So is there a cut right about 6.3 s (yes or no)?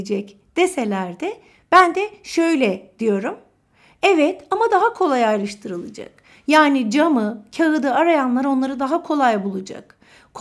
no